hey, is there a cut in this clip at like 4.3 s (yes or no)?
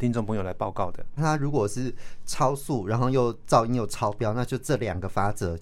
no